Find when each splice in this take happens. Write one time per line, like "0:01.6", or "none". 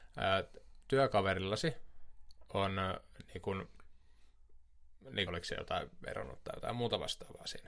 0:05.3